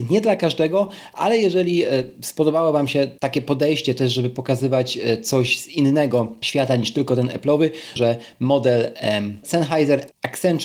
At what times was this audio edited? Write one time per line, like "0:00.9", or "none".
0:08.0